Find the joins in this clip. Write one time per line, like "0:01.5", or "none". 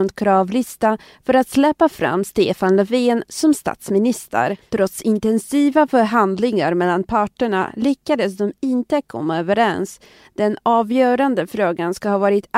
none